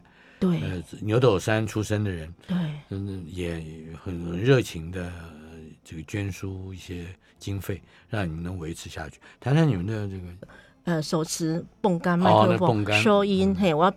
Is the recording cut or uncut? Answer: cut